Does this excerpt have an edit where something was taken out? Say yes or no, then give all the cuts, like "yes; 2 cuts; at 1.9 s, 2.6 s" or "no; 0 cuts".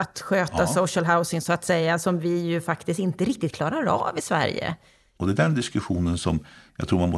yes; 1 cut; at 5.2 s